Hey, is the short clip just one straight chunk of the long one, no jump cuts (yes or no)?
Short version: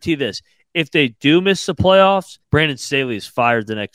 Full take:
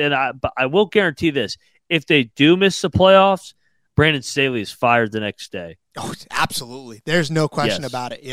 no